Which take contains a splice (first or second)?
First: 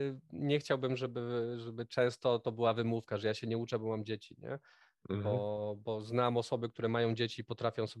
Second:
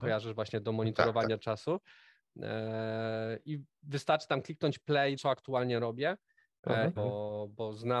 second